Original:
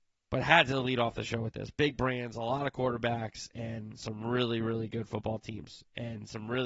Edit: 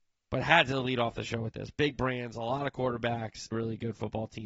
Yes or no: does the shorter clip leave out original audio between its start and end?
yes